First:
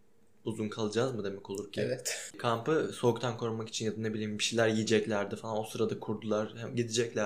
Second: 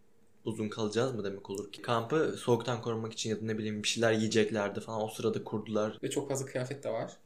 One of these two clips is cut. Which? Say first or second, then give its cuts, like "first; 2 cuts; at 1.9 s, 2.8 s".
second; 2 cuts; at 1.8 s, 6.0 s